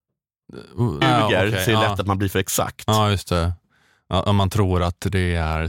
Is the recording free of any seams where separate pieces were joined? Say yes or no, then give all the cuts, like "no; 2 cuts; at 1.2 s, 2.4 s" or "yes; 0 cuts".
no; 1 cut; at 1.0 s